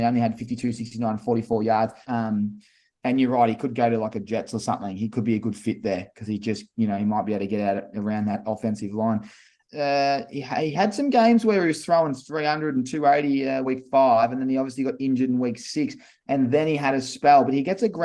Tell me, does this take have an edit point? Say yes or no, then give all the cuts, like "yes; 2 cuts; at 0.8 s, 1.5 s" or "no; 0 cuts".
yes; 3 cuts; at 2.0 s, 9.6 s, 13.6 s